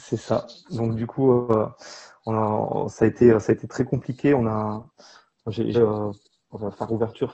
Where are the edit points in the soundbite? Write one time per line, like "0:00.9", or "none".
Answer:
0:05.7